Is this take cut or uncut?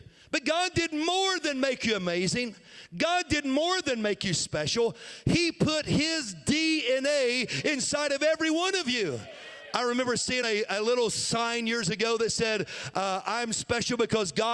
uncut